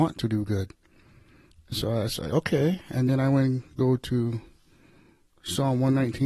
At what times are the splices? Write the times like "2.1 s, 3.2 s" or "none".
none